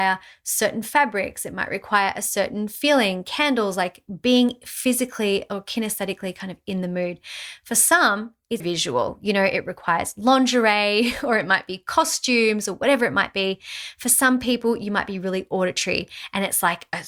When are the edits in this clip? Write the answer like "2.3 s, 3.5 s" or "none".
8.6 s